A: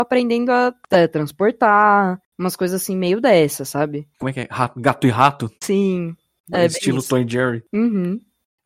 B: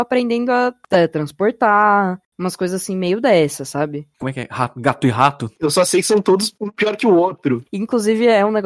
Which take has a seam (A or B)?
B